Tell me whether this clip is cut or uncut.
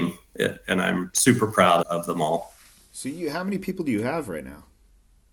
cut